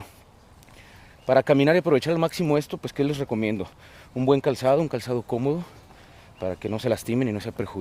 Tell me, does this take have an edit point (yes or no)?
no